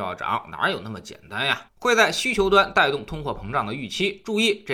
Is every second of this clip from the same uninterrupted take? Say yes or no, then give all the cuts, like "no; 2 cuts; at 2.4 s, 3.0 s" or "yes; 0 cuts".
no; 1 cut; at 1.7 s